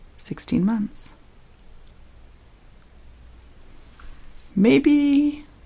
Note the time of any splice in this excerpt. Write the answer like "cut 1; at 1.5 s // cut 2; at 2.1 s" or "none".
cut 1; at 4.5 s